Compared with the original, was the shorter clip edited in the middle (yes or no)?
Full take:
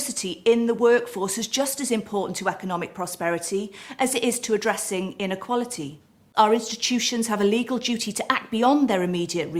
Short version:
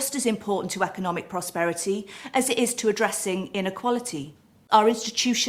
no